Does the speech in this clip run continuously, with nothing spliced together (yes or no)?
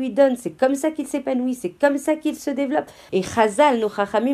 no